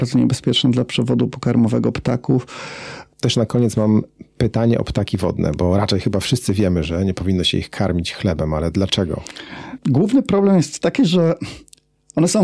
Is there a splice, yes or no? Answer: yes